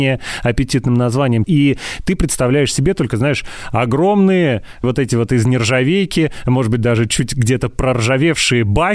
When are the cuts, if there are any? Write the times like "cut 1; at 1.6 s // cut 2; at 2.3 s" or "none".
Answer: cut 1; at 1.4 s